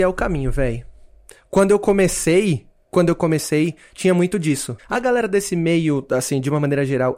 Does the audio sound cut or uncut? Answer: cut